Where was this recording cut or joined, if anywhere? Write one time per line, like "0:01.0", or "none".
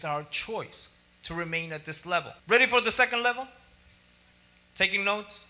0:02.4